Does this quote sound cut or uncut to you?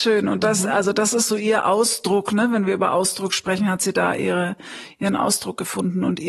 uncut